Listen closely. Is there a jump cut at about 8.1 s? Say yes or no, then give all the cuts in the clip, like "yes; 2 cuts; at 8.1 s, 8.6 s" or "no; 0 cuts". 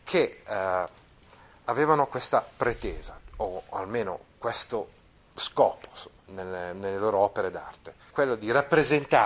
yes; 1 cut; at 8.1 s